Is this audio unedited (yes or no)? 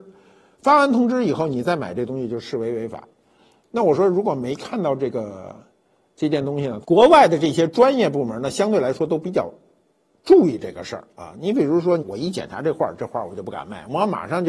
no